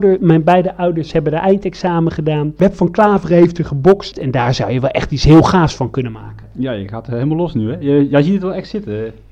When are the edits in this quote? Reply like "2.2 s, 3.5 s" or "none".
4.1 s

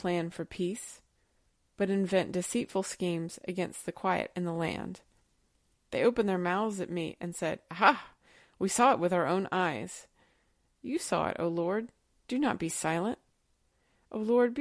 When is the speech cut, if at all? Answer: none

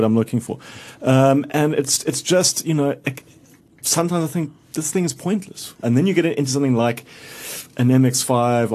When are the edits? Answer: 5.8 s

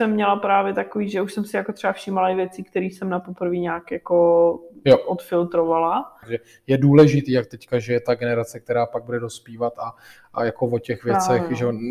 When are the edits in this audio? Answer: 6.2 s

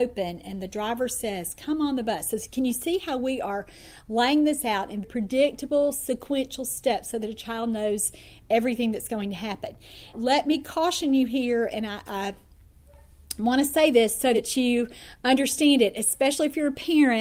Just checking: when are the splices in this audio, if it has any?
5.0 s, 10.1 s

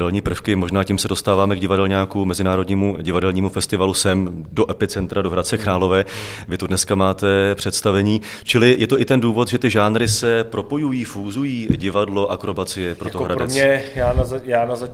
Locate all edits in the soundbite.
none

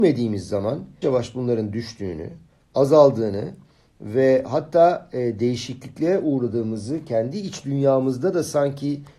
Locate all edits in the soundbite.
1.0 s

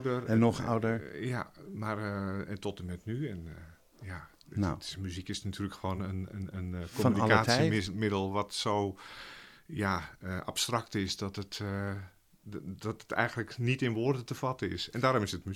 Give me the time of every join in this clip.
none

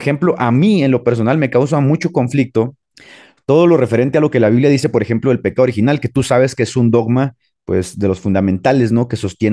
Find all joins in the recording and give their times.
none

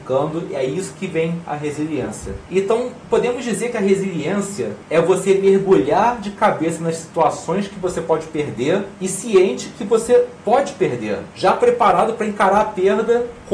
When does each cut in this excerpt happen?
none

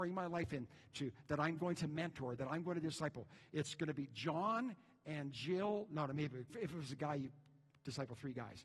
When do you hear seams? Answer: 6.5 s

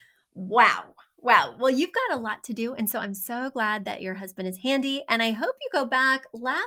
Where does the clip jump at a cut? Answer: none

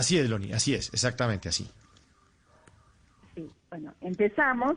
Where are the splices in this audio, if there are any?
none

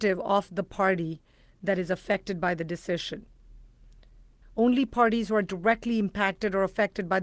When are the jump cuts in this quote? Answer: 4.4 s

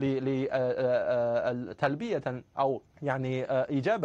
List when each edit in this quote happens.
2.9 s

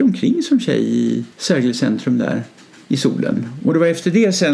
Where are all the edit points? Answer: 1.3 s, 3.6 s

